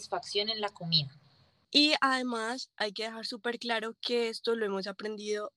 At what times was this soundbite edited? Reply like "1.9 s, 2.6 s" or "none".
none